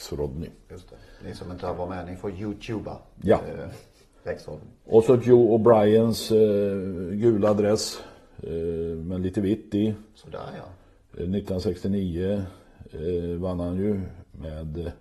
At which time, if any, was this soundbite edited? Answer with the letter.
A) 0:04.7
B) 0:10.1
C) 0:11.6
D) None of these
D